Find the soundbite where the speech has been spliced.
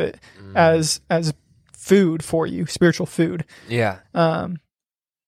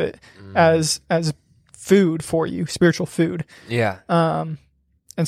first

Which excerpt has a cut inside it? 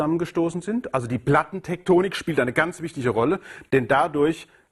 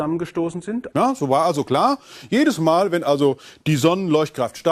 second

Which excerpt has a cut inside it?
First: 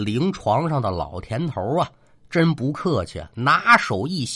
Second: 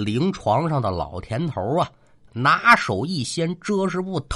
second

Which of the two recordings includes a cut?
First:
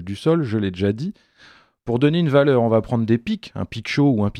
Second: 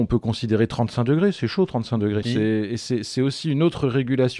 second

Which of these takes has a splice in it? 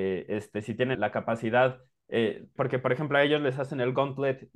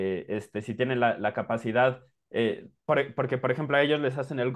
first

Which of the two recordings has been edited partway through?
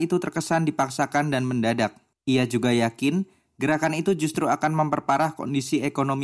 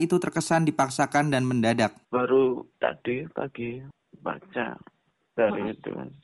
second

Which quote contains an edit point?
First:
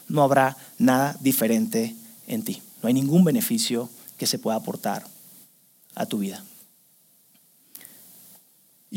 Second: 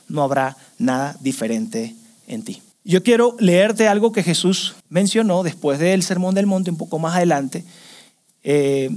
second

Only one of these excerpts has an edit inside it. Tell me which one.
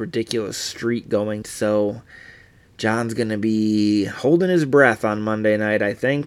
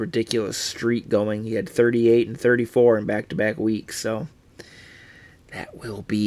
first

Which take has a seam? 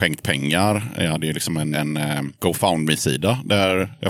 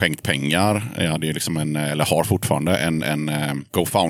first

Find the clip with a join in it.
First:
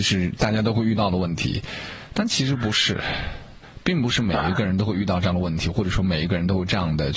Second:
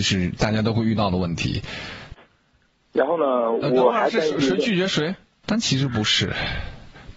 second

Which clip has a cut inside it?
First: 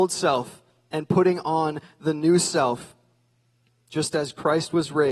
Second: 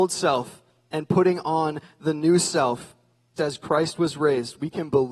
second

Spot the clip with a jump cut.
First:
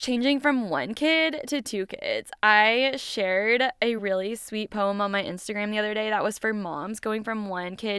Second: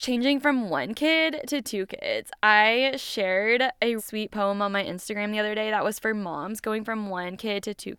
second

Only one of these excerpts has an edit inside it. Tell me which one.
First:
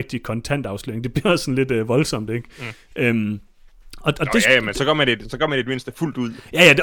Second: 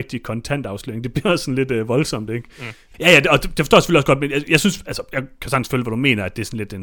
second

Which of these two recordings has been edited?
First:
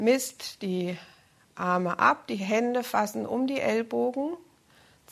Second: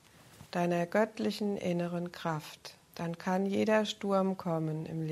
second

